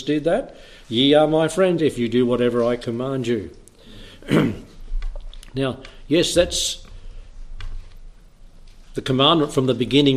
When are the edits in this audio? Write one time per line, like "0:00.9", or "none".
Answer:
0:01.8